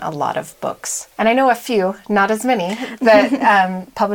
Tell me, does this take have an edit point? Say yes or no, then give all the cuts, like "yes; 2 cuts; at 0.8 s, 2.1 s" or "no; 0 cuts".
yes; 1 cut; at 1.1 s